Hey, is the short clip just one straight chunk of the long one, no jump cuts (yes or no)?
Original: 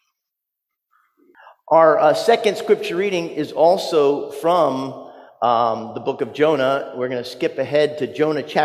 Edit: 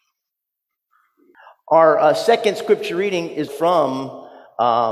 no